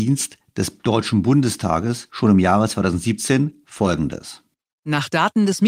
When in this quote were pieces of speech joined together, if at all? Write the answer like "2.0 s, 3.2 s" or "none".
none